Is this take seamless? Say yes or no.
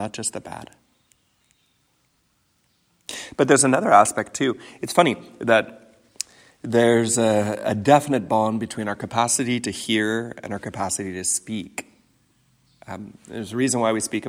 yes